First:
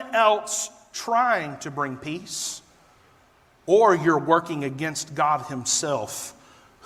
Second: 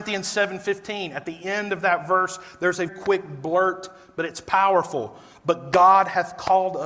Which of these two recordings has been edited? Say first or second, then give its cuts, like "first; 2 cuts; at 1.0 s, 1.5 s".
second; 1 cut; at 2.9 s